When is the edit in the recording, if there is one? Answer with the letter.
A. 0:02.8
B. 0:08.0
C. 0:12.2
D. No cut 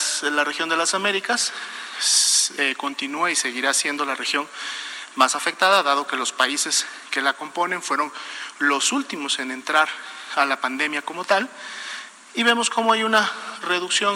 D